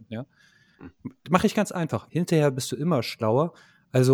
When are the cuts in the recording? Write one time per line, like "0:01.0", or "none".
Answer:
0:01.0
0:02.1